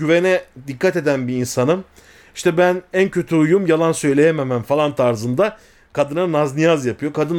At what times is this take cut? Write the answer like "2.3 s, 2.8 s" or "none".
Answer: none